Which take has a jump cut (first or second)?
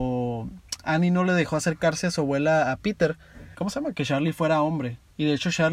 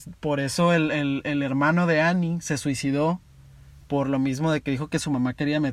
first